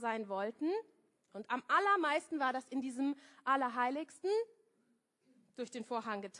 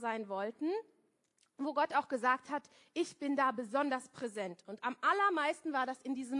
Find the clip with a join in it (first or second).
first